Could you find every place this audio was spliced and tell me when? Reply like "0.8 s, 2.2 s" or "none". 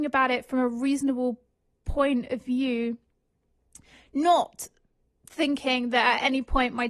none